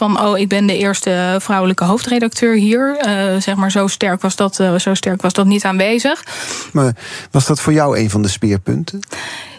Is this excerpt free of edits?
no; 1 cut; at 6.7 s

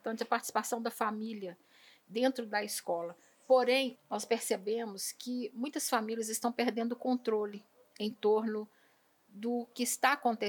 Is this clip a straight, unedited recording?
no; 1 cut; at 4.0 s

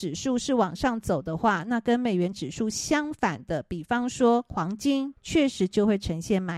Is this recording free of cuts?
no; 1 cut; at 5.2 s

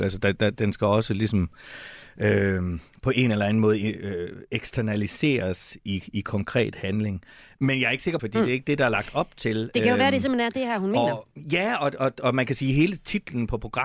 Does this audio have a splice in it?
yes; 1 cut; at 8.2 s

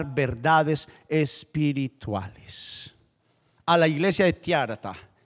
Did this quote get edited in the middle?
yes; 1 cut; at 3.6 s

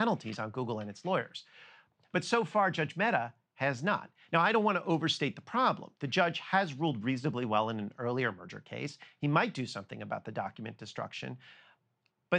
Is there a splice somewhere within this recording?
no; 0 cuts

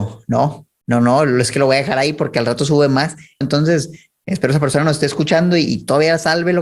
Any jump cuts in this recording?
yes; 1 cut; at 3.4 s

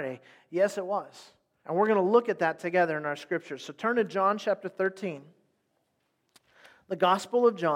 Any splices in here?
yes; 1 cut; at 1.6 s

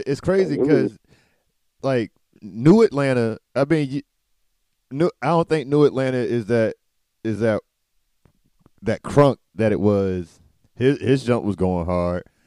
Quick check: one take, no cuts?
no; 1 cut; at 10.6 s

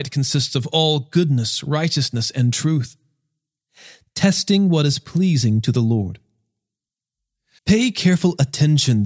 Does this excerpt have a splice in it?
yes; 1 cut; at 7.6 s

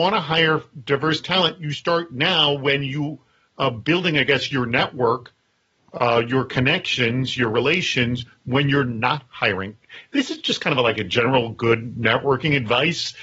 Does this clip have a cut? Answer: no; 0 cuts

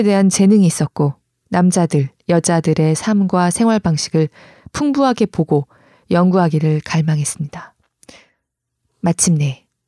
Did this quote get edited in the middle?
no; 0 cuts

